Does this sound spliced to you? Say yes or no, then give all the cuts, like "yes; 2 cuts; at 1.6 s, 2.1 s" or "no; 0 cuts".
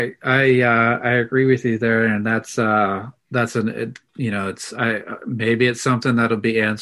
no; 0 cuts